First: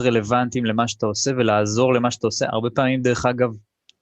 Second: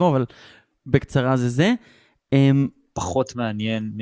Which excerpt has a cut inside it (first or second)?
second